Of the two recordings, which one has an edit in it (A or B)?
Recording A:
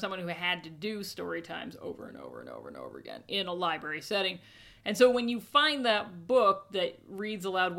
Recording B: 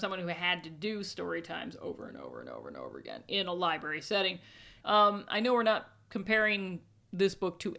B